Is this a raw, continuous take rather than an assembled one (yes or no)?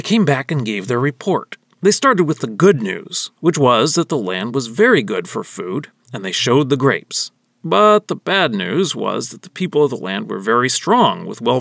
yes